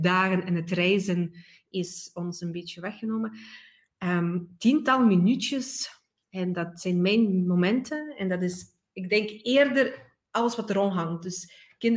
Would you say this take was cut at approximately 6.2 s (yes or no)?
yes